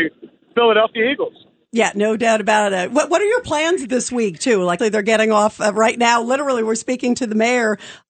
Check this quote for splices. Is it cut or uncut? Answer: cut